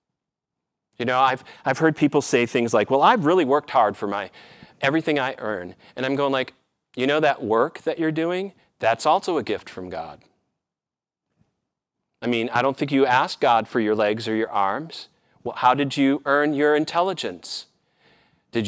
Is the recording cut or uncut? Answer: uncut